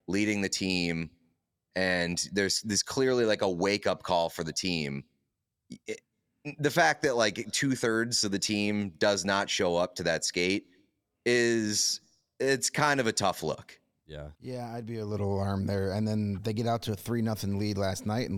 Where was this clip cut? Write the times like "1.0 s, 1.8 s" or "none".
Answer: 14.4 s